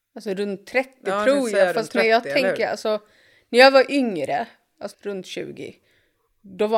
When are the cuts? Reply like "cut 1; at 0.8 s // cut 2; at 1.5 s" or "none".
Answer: cut 1; at 4.9 s